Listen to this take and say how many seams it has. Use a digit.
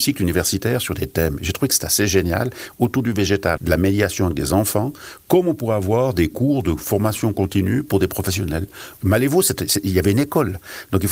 1